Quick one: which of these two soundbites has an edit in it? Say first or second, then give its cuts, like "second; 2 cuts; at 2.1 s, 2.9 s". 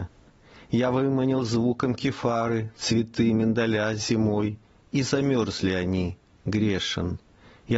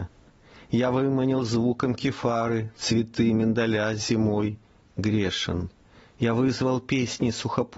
second; 1 cut; at 4.8 s